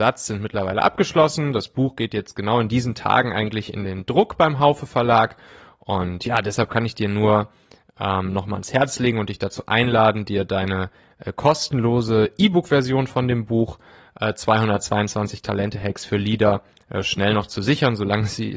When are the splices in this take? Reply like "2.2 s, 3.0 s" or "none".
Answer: none